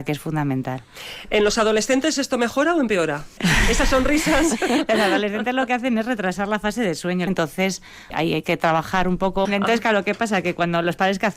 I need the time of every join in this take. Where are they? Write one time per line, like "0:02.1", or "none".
0:07.3
0:09.4